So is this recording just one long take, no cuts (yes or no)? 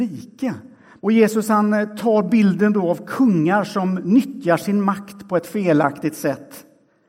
no